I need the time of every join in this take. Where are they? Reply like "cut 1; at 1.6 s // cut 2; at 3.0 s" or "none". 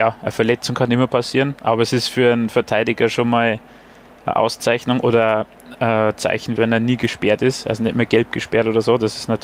cut 1; at 6.6 s